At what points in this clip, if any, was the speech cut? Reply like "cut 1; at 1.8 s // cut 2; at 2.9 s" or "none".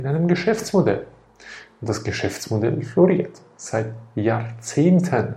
none